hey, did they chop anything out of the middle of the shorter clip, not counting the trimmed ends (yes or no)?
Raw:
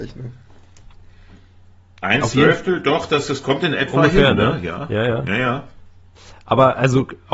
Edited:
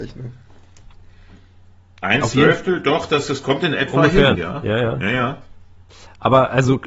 yes